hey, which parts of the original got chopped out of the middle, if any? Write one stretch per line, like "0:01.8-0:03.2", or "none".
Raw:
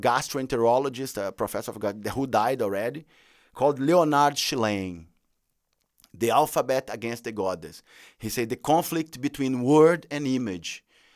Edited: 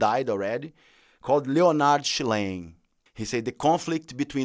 0:05.4-0:08.1